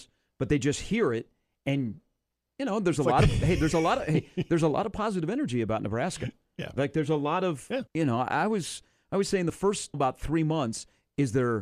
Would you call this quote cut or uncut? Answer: cut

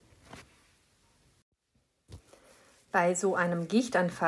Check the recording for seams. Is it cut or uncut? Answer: uncut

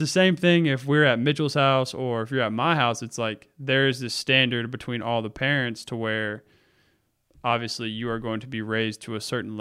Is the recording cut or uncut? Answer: uncut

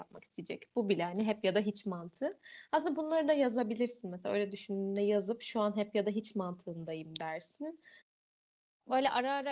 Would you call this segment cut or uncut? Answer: uncut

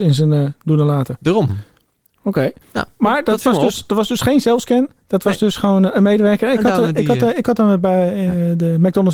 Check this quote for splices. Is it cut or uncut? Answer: uncut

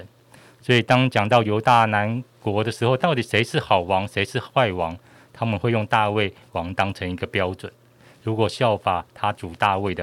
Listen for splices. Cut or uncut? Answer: uncut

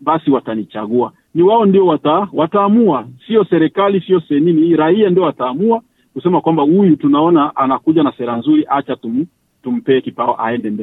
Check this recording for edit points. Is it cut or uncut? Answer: cut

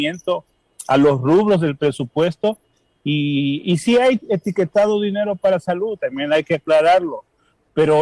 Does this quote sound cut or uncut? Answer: uncut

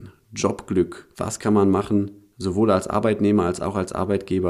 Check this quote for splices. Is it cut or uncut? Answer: cut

